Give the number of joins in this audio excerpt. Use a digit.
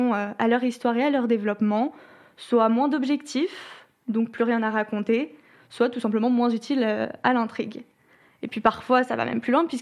0